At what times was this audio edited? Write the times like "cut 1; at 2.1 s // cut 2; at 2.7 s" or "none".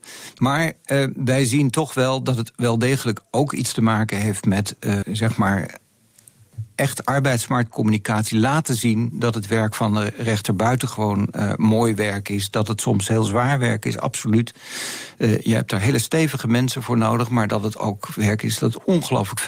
cut 1; at 5.0 s